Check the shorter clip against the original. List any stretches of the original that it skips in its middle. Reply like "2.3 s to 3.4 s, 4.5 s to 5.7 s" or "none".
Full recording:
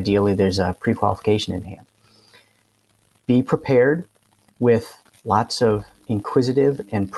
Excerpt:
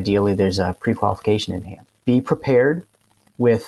2.0 s to 3.2 s